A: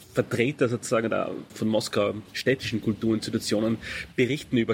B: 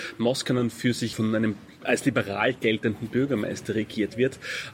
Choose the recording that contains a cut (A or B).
B